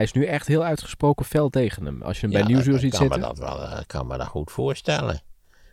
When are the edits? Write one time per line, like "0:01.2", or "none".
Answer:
none